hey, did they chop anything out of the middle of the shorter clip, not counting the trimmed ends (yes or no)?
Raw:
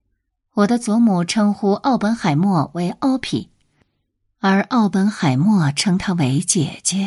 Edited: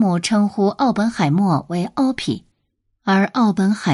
yes